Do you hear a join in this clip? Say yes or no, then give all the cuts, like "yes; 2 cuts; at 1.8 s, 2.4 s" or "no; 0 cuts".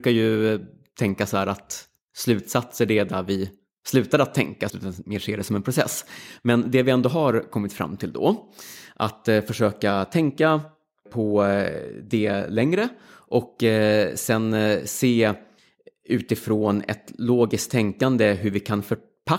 yes; 1 cut; at 4.7 s